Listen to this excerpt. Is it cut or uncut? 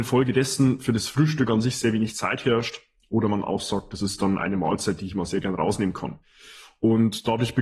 uncut